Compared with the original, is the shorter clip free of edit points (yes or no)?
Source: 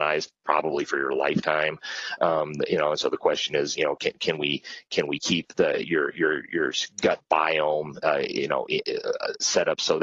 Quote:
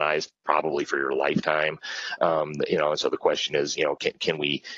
yes